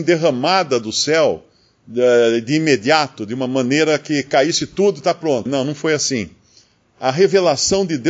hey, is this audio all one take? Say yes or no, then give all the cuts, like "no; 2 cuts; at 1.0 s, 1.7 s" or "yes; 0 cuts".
no; 1 cut; at 5.5 s